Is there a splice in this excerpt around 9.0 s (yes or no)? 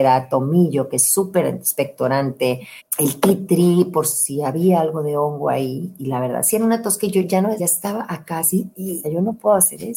yes